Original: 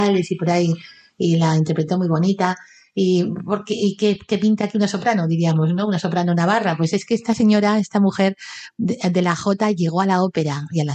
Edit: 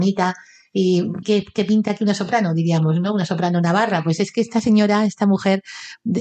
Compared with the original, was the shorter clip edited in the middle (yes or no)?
yes